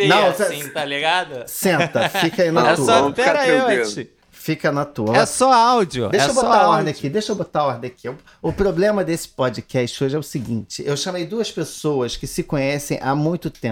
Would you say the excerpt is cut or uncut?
uncut